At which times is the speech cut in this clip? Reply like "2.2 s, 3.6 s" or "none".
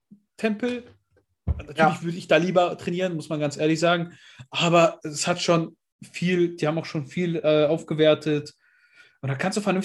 none